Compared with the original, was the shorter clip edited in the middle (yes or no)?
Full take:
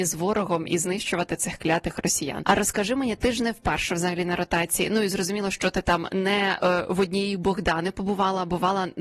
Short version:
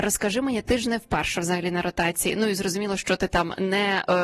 no